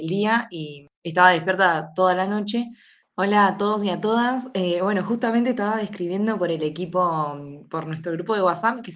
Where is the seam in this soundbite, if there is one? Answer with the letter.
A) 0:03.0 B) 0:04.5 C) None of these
A